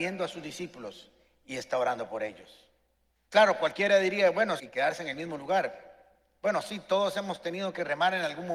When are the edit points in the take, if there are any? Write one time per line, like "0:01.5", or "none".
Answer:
0:03.2
0:04.6